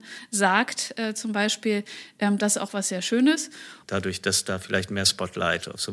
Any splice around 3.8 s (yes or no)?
yes